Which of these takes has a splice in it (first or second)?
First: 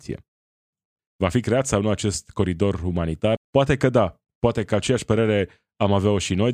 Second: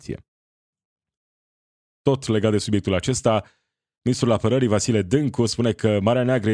first